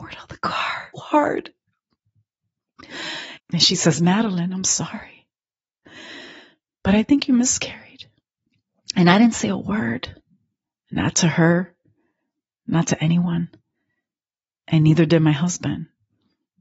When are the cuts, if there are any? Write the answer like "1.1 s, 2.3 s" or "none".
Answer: 0.9 s, 3.4 s